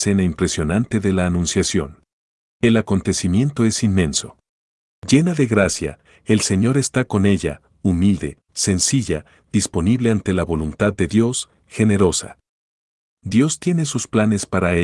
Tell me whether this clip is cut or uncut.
cut